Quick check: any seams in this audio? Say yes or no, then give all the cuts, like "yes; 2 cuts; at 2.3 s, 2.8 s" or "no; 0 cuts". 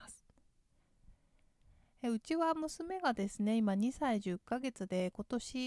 no; 0 cuts